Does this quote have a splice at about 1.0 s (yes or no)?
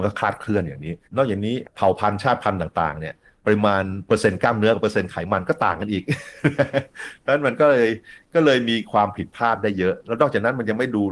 yes